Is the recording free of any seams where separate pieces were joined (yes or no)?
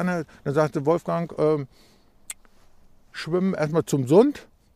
yes